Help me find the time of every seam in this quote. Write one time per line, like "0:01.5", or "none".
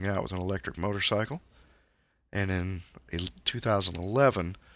none